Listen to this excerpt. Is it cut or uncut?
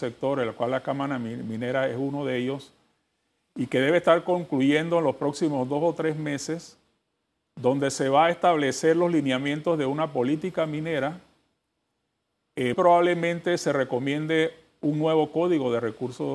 cut